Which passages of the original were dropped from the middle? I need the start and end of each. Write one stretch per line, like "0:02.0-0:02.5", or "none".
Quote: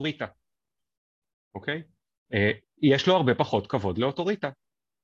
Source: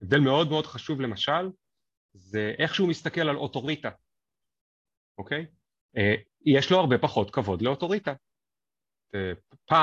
none